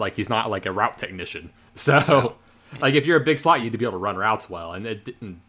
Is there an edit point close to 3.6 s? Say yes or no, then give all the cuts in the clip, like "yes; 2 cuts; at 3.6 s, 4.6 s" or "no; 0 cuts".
no; 0 cuts